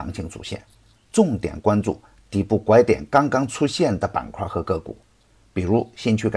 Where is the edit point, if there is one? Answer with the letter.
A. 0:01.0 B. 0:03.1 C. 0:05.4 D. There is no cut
D